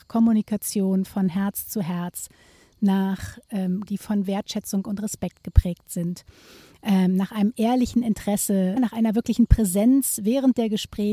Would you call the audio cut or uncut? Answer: cut